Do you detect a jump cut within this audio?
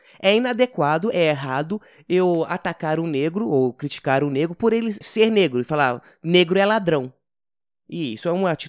yes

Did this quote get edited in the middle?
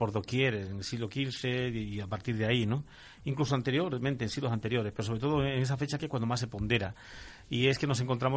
no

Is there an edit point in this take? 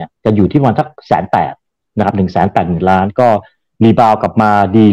no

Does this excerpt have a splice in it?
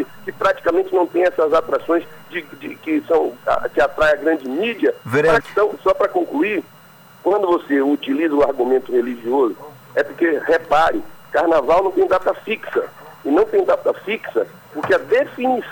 yes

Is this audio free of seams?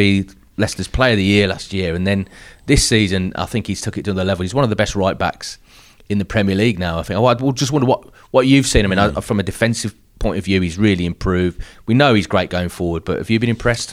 yes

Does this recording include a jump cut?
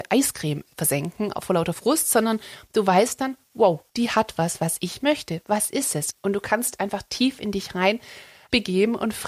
yes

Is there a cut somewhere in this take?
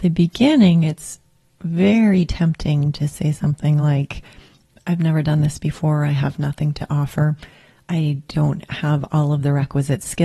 no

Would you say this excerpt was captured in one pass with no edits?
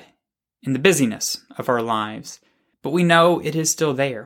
no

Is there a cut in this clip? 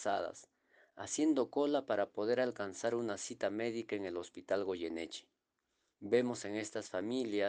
yes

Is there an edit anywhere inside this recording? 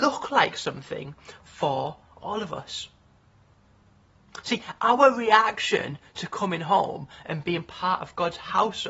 no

